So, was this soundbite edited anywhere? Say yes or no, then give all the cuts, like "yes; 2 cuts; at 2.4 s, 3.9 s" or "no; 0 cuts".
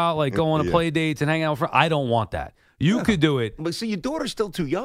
yes; 1 cut; at 3.6 s